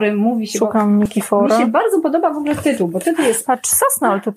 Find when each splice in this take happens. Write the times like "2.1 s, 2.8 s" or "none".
none